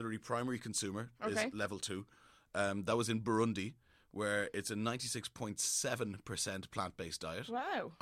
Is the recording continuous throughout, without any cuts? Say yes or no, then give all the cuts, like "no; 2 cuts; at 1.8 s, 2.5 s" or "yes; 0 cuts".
yes; 0 cuts